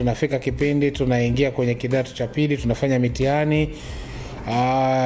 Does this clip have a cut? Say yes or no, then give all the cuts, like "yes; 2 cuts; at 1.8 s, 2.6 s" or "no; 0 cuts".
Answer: no; 0 cuts